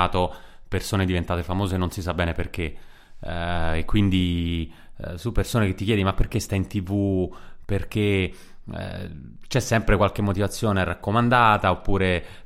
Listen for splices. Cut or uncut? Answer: uncut